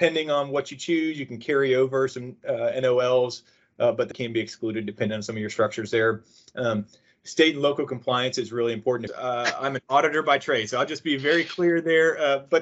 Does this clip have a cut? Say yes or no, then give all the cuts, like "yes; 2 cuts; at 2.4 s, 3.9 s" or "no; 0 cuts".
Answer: yes; 2 cuts; at 4.1 s, 9.1 s